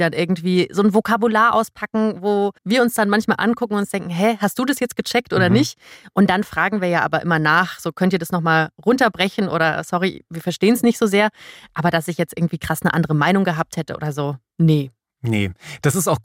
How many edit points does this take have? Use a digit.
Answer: 1